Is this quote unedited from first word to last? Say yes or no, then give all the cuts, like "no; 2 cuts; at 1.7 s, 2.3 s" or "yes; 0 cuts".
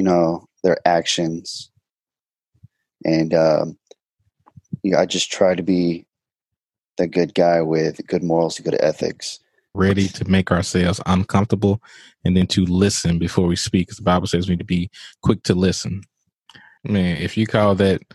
no; 2 cuts; at 9.7 s, 16.8 s